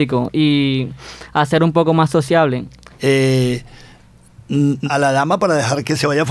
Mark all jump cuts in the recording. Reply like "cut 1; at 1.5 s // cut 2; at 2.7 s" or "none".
cut 1; at 2.9 s // cut 2; at 4.8 s